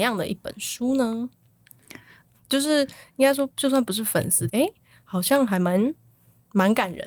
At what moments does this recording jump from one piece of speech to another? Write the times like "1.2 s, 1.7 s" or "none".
2.3 s, 4.5 s